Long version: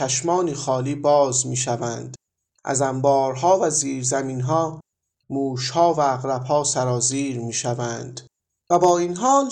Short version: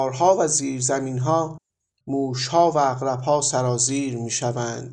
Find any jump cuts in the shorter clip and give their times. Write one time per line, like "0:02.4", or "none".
none

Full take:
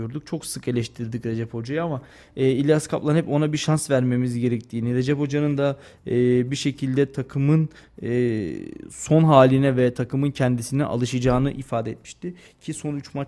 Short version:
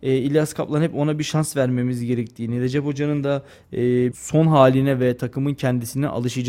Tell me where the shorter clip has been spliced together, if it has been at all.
0:04.1

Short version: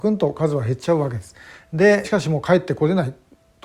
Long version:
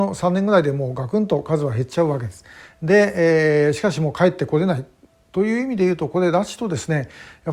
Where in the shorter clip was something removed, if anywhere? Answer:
0:02.0

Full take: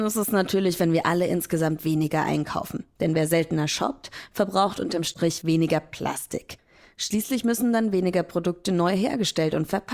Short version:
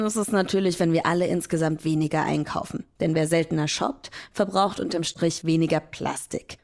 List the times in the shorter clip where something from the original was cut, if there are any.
none

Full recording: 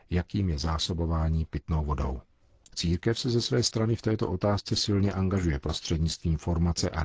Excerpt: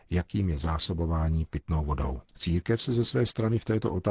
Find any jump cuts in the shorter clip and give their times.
0:02.3

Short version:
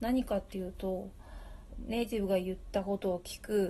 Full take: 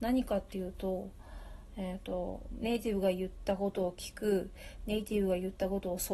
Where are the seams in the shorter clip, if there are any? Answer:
0:01.7

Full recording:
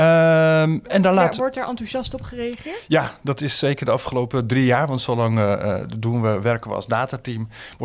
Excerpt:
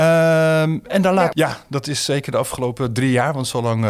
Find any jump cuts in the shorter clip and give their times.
0:01.3

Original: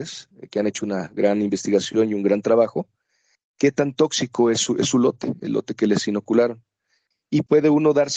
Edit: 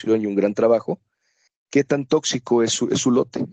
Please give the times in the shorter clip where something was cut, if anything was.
none

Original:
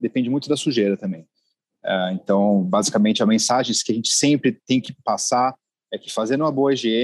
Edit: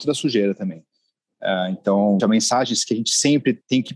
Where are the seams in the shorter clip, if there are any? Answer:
0:02.2

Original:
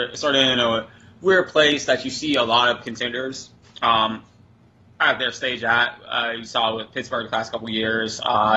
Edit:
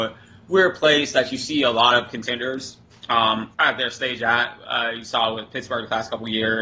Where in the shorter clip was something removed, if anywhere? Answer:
0:03.5

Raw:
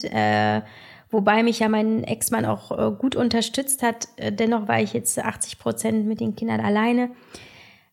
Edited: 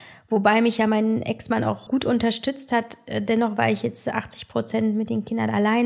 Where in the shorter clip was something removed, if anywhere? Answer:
0:01.9

